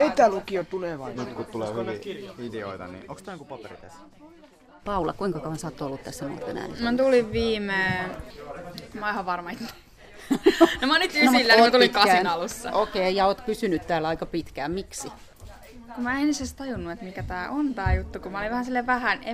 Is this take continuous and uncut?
yes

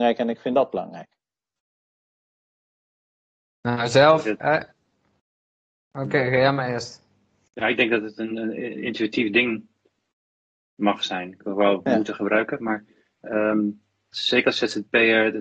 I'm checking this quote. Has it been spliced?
yes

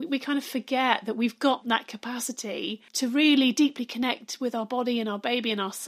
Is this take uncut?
no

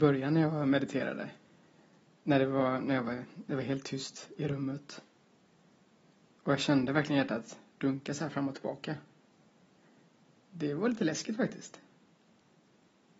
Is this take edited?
no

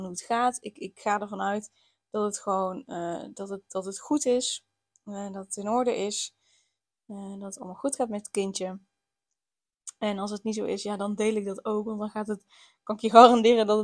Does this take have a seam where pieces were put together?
no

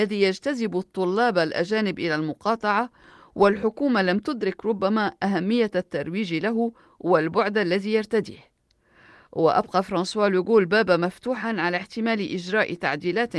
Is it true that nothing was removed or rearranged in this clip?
yes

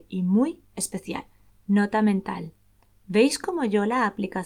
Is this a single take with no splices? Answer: no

